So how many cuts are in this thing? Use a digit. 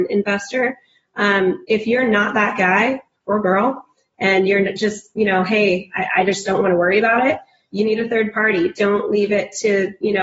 0